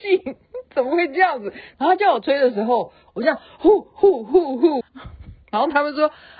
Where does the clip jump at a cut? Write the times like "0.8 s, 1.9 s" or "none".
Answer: 1.7 s, 3.1 s, 4.8 s